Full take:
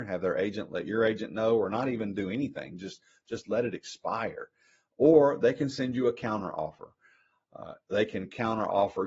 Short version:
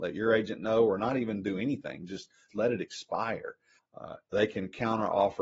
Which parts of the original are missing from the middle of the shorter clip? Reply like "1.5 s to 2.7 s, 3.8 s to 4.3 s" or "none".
3.2 s to 3.4 s, 4.7 s to 7.4 s